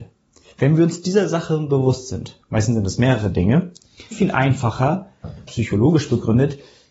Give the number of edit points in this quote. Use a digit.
2